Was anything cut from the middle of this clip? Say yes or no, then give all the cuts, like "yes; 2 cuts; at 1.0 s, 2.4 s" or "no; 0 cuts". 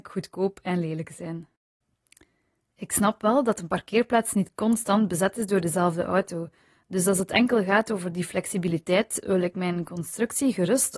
no; 0 cuts